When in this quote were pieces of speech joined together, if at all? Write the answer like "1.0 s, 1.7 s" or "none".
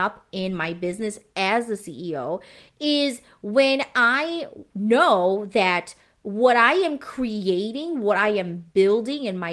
none